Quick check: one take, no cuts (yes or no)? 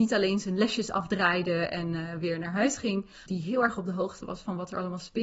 no